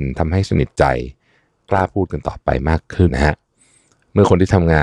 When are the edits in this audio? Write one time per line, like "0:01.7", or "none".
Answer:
0:03.1